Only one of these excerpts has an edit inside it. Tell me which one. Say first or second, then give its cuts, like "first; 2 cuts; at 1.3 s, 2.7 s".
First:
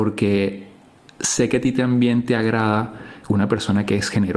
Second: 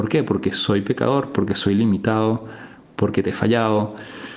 first; 1 cut; at 3.2 s